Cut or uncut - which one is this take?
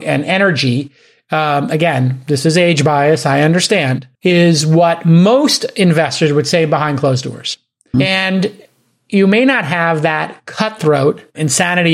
cut